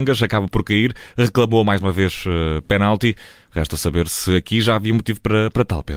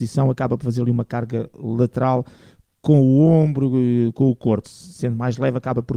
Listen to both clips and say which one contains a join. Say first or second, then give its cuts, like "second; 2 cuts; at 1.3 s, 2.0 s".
second; 1 cut; at 4.6 s